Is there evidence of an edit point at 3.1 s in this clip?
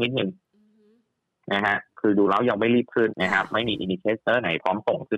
yes; 1 cut; at 3.1 s

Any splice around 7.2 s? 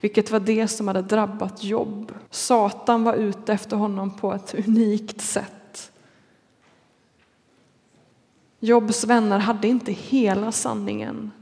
no; 1 cut; at 2.3 s

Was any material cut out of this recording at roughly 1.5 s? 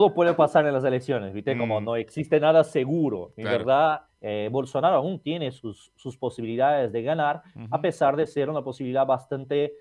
no; 1 cut; at 4.1 s

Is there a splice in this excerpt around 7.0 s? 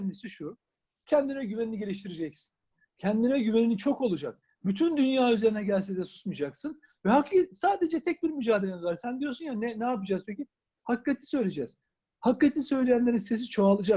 no; 0 cuts

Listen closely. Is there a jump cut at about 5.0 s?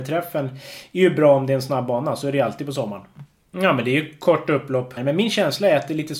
yes; 2 cuts; at 3.5 s, 5.0 s

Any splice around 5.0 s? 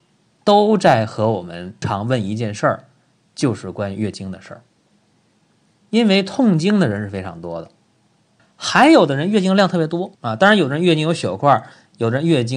no; 3 cuts; at 1.8 s, 8.4 s, 10.1 s

